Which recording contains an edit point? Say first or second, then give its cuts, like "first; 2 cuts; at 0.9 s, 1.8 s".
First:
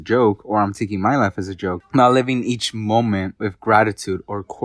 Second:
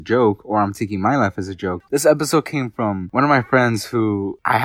second; 1 cut; at 1.9 s